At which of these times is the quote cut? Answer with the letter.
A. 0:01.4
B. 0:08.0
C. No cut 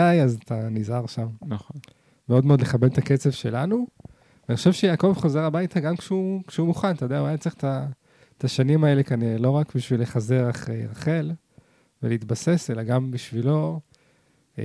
C